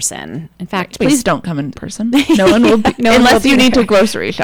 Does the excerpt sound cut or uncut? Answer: cut